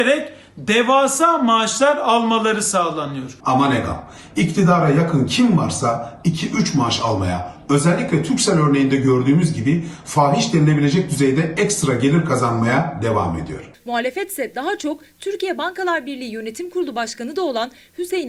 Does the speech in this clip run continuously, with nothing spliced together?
no; 2 cuts; at 3.4 s, 13.7 s

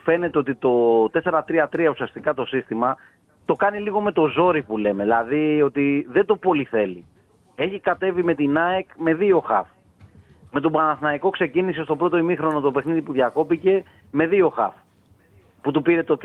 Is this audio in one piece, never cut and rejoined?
yes; 0 cuts

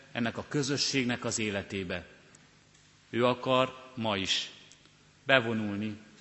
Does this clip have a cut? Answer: no; 0 cuts

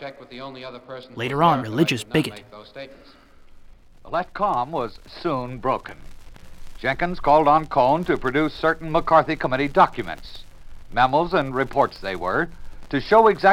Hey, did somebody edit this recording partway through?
yes; 1 cut; at 1.6 s

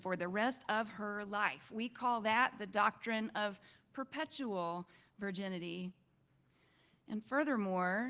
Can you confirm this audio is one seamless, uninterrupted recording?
yes; 0 cuts

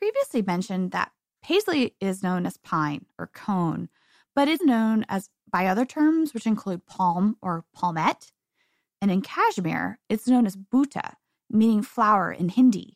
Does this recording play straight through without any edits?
no; 2 cuts; at 4.6 s, 8.9 s

